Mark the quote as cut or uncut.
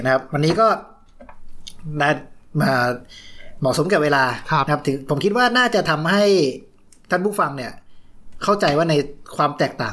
uncut